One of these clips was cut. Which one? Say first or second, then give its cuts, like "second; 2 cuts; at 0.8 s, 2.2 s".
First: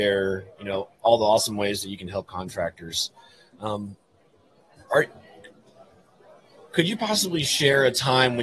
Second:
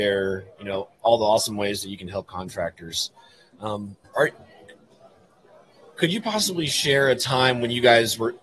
second; 1 cut; at 4.0 s